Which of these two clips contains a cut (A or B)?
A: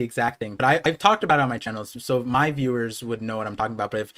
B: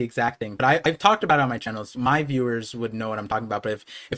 B